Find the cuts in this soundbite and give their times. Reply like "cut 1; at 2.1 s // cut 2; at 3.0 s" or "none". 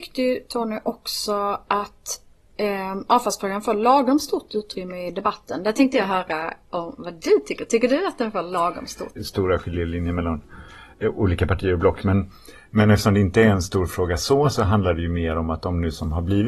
cut 1; at 9.2 s